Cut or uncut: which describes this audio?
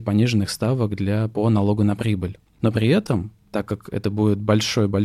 uncut